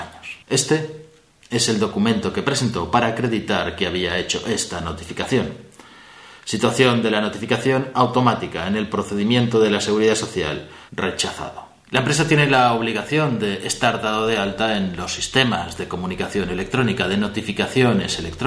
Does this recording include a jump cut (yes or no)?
yes